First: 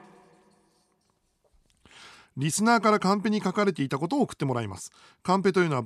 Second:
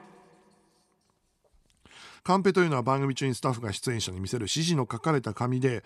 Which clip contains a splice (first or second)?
second